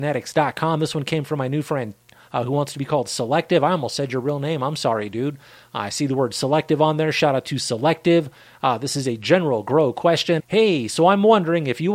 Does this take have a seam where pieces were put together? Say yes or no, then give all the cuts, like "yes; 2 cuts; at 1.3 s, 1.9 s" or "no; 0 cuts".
yes; 1 cut; at 10.4 s